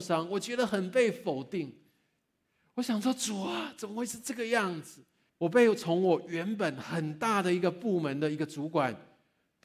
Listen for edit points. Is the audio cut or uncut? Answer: cut